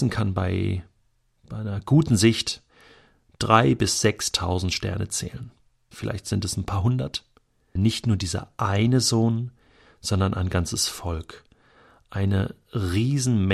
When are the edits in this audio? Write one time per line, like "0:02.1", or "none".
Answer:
0:05.9
0:07.8